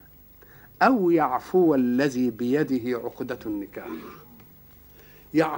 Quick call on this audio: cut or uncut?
uncut